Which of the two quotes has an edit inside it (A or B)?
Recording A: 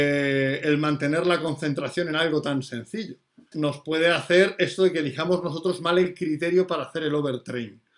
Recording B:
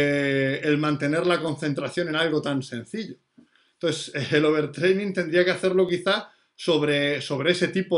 A